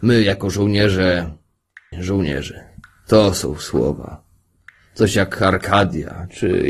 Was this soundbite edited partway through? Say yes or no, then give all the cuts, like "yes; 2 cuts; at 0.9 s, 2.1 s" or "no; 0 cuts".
yes; 1 cut; at 1.9 s